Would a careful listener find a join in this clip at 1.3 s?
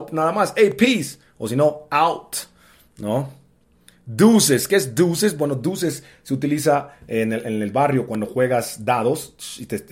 no; 0 cuts

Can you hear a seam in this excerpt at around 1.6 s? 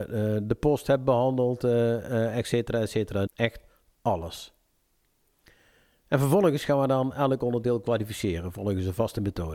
no; 1 cut; at 3.3 s

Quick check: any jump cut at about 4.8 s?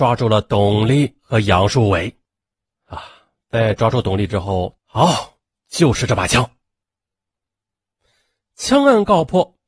yes; 1 cut; at 4.8 s

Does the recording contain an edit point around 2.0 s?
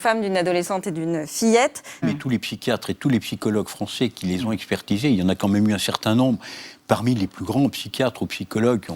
yes; 1 cut; at 2.0 s

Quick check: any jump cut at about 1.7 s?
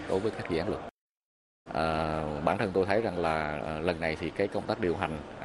yes; 1 cut; at 1.7 s

